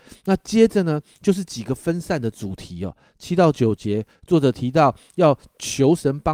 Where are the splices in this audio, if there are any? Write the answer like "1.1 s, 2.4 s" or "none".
none

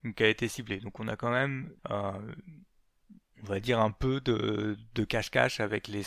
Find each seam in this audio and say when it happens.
1.8 s

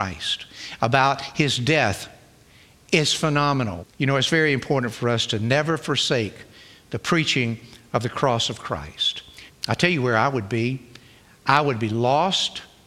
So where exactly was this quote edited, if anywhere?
3.8 s, 9.5 s

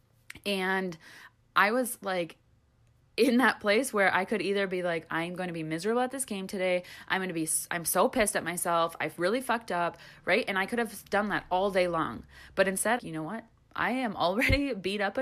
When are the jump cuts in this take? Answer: 5.1 s, 13.0 s

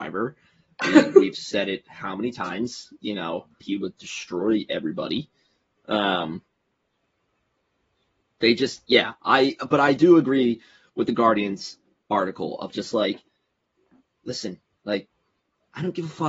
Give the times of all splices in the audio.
3.6 s

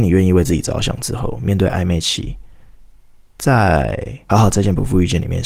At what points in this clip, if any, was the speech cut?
4.3 s

